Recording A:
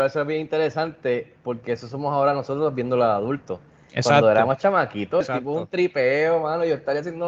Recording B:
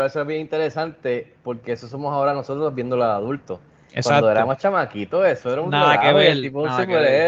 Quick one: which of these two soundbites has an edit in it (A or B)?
A